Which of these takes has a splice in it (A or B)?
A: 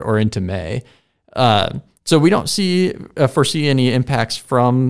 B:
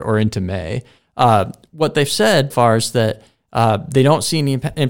B